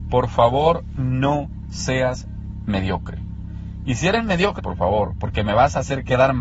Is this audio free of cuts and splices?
no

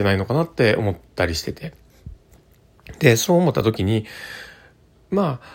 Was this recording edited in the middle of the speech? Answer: no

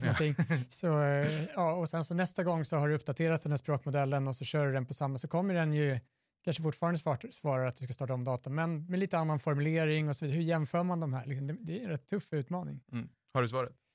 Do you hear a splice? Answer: no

